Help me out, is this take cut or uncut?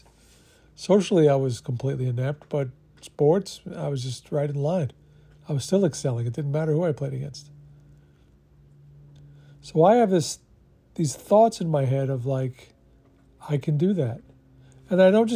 uncut